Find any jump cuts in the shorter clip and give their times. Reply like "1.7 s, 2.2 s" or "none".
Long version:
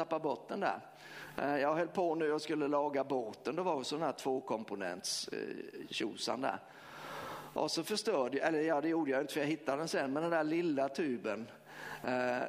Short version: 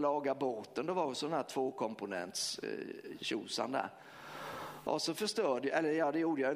none